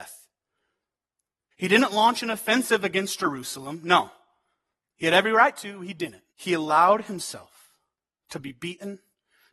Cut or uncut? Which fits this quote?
cut